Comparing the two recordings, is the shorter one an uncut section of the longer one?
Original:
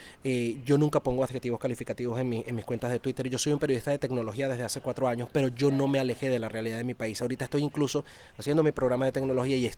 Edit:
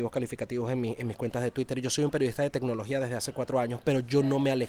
yes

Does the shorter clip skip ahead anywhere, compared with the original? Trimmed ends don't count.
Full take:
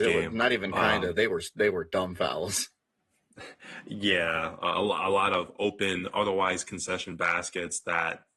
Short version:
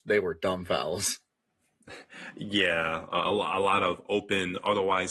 no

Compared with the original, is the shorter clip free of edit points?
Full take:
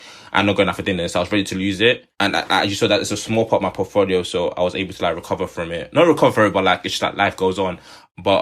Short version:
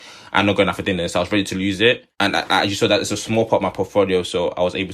yes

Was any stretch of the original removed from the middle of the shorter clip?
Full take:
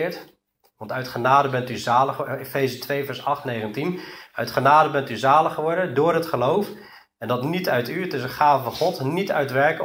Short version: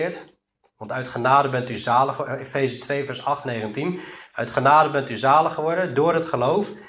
no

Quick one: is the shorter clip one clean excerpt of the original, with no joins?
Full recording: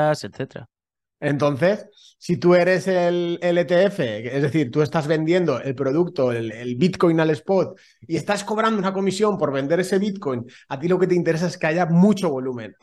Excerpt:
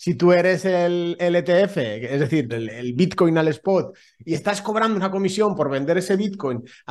no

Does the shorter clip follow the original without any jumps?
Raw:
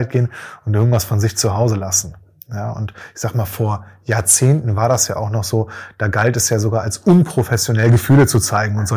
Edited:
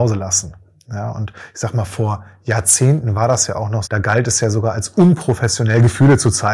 no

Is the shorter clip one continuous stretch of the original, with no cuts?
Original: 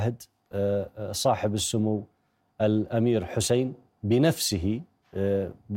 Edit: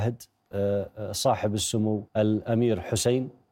no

